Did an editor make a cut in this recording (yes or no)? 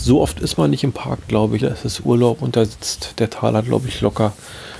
yes